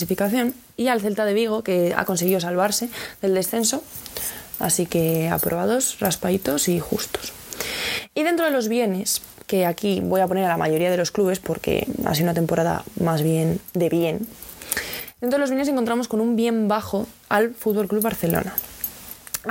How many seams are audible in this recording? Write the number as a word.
zero